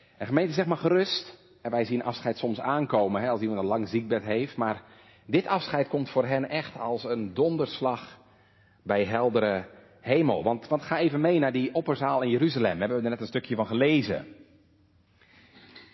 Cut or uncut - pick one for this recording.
uncut